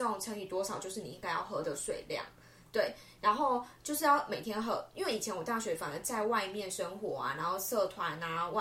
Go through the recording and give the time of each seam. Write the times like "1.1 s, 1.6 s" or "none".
none